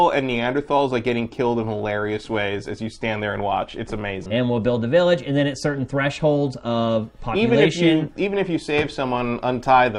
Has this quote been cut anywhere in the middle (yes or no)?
yes